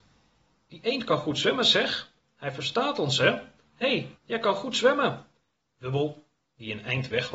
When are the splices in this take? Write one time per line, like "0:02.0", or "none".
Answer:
0:04.2